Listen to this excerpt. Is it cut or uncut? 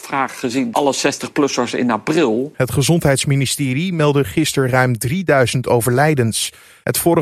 cut